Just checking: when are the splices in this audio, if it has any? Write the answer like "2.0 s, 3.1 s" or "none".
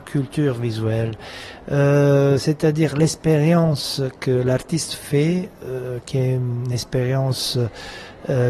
none